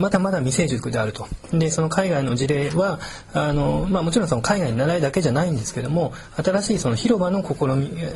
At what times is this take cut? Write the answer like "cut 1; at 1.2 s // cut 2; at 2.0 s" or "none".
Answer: none